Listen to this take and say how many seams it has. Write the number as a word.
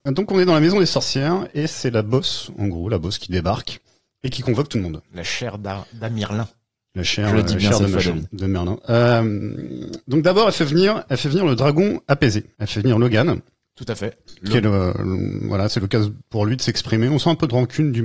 zero